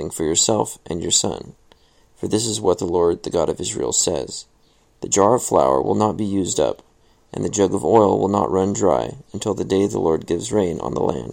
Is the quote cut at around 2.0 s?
no; 0 cuts

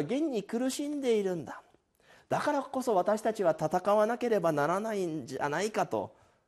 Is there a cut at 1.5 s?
no; 0 cuts

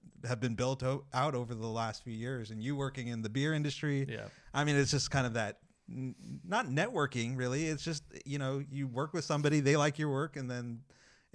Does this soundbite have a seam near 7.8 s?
no; 0 cuts

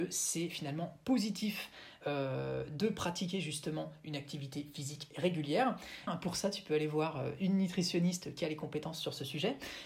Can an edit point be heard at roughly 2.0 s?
no; 1 cut; at 6.1 s

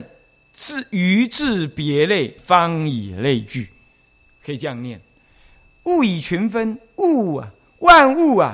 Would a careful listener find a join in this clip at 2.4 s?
yes; 1 cut; at 2.4 s

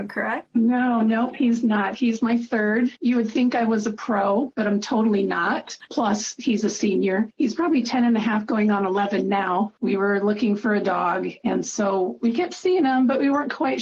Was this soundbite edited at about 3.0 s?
no; 1 cut; at 5.9 s

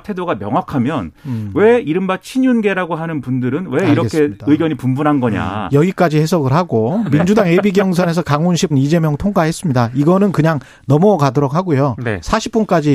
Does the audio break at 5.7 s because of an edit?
no; 1 cut; at 8.7 s

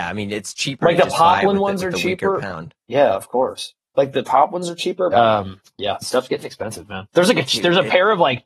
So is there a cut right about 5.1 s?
yes; 1 cut; at 5.1 s

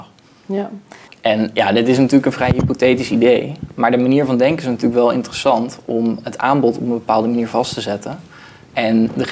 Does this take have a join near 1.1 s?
yes; 1 cut; at 1.1 s

